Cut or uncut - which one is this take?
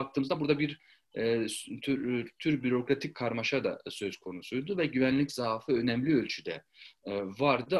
uncut